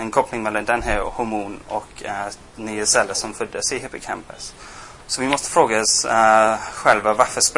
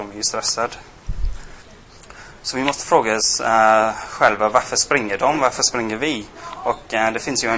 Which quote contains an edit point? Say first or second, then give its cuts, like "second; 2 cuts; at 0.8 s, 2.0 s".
first; 1 cut; at 5.0 s